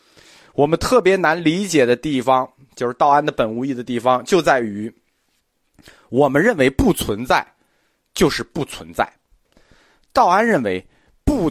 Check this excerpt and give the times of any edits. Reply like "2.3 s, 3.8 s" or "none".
none